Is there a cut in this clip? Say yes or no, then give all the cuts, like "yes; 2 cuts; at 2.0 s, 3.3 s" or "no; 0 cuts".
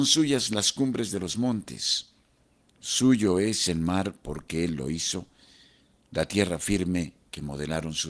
no; 0 cuts